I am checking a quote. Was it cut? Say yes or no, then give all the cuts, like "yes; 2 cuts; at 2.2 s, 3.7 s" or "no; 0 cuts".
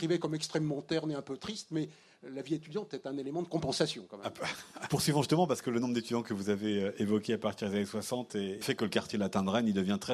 yes; 2 cuts; at 4.9 s, 8.6 s